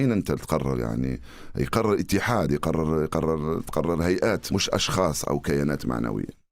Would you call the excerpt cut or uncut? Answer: uncut